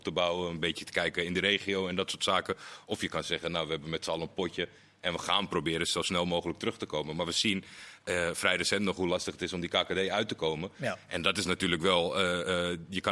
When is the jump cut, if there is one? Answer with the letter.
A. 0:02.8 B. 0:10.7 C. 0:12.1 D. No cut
D